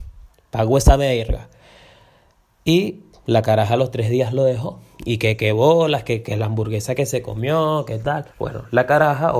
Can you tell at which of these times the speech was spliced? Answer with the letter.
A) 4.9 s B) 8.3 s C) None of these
B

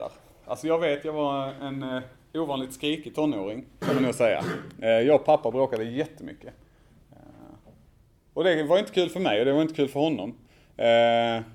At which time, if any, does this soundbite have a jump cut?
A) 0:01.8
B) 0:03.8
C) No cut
B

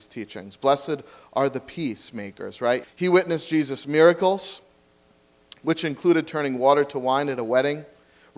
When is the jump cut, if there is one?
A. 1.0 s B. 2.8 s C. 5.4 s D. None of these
B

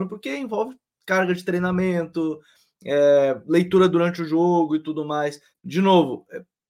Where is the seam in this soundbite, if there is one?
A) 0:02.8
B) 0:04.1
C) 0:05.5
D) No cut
C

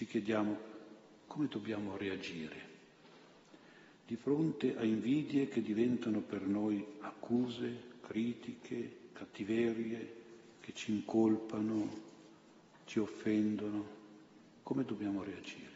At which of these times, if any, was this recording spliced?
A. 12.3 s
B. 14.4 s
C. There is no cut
C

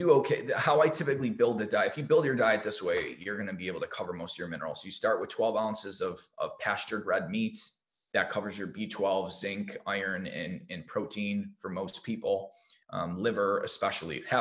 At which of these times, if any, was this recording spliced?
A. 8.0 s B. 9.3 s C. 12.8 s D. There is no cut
C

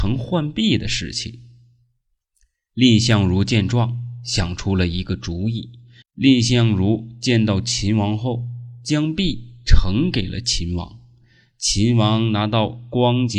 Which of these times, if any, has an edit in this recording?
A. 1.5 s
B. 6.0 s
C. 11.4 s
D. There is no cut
B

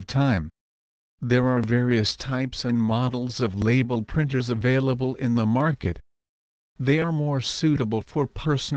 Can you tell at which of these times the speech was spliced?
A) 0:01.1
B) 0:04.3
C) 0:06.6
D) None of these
C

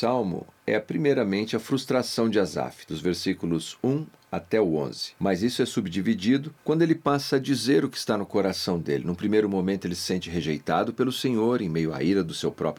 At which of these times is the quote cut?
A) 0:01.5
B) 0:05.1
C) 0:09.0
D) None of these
D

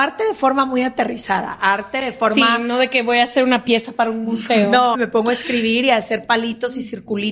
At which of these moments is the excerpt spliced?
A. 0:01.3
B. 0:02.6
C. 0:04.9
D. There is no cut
C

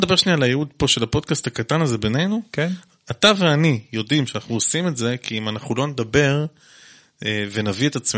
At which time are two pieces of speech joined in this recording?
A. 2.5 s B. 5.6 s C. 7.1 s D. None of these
D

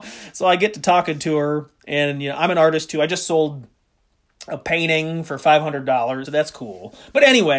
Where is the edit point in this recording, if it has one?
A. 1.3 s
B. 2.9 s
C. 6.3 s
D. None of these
C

